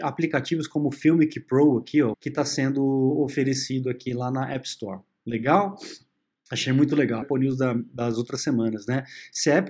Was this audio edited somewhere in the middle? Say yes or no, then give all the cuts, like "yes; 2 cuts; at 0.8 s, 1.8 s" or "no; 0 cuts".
yes; 2 cuts; at 2.1 s, 7.2 s